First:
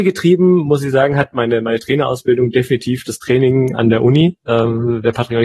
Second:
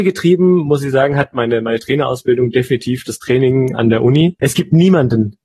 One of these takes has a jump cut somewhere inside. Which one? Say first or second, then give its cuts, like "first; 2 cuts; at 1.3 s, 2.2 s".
second; 1 cut; at 4.4 s